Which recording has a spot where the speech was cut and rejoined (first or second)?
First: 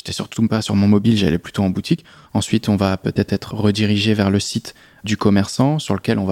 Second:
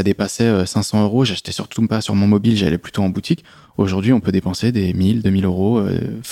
first